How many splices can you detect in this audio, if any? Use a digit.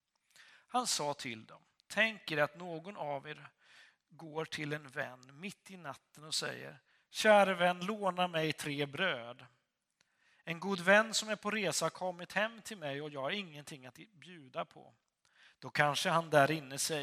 0